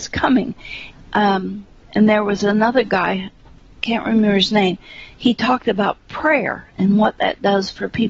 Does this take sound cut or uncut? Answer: cut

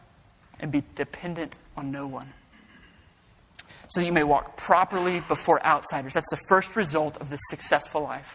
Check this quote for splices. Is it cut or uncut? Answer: uncut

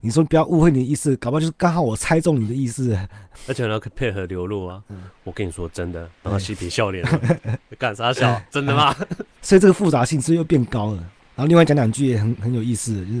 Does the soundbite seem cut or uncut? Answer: uncut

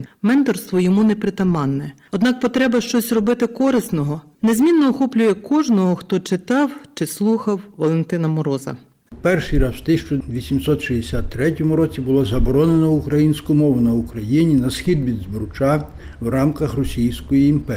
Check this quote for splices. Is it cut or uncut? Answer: uncut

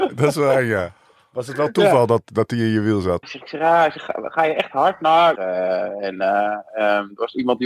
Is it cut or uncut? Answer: cut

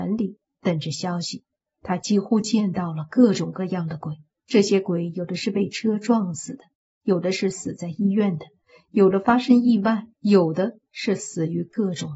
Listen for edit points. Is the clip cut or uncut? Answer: cut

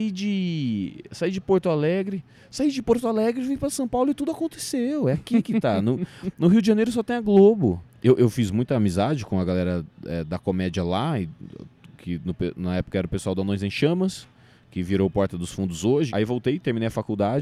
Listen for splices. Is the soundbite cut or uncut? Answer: cut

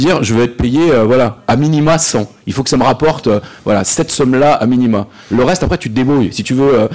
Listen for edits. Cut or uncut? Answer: uncut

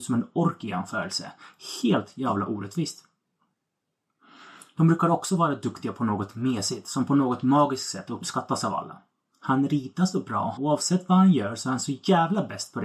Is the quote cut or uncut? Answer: cut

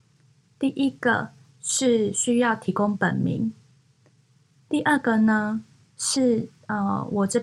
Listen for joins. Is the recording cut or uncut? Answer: uncut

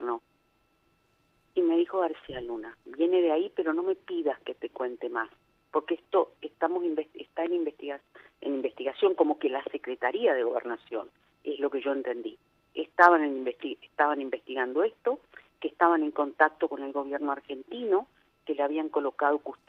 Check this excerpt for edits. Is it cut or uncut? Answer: uncut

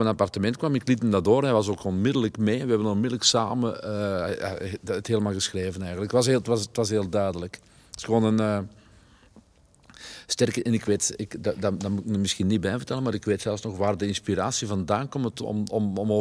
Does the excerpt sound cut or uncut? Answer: uncut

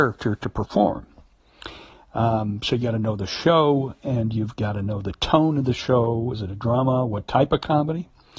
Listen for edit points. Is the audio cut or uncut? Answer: cut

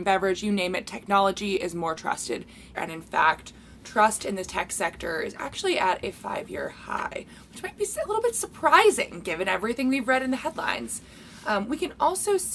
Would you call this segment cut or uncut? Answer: cut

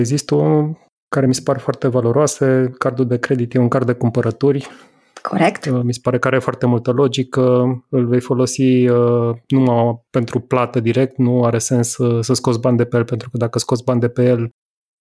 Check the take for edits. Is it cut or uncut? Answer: uncut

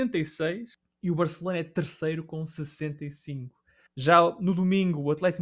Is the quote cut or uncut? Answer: cut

